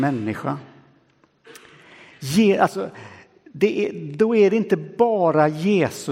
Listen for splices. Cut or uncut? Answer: uncut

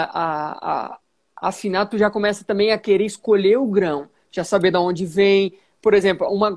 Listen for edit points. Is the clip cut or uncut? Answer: uncut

